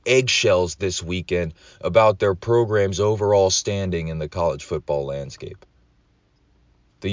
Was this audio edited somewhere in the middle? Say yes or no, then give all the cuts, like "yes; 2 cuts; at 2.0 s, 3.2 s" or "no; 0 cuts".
no; 0 cuts